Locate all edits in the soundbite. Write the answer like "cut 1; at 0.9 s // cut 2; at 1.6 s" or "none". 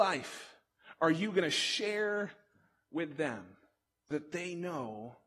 cut 1; at 4.1 s